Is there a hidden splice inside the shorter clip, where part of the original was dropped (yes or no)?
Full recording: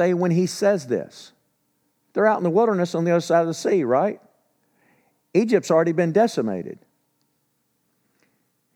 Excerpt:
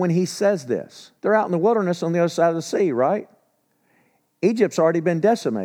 yes